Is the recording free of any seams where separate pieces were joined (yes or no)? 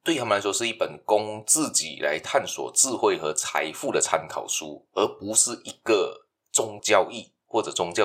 no